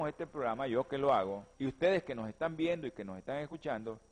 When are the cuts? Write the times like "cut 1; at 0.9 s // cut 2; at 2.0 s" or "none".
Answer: cut 1; at 1.5 s